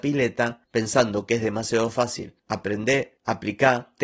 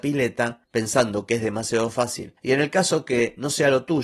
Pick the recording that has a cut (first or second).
second